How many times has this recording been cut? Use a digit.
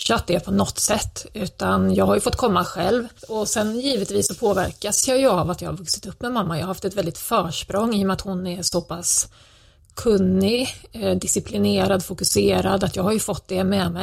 1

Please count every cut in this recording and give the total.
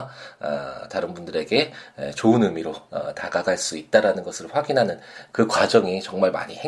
0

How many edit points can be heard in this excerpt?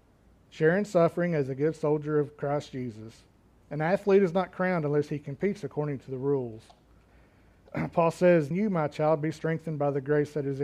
3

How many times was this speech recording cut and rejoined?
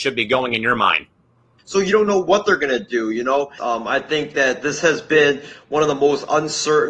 2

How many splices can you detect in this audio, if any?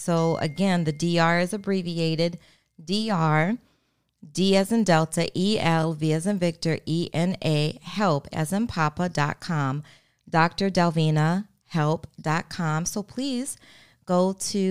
1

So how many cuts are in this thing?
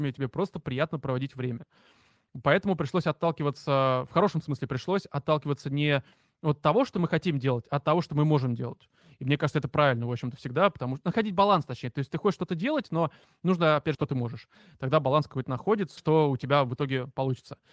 2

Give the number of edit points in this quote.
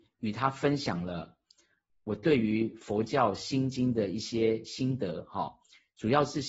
0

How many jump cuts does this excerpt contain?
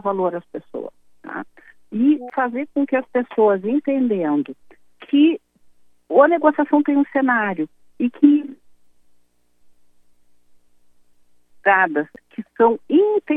0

